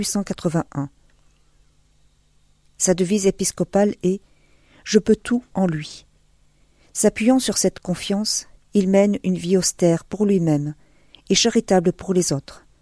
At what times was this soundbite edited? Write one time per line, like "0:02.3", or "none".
none